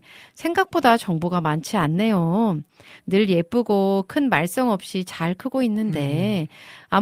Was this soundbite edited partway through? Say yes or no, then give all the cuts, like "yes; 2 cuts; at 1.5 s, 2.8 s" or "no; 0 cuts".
yes; 1 cut; at 3.0 s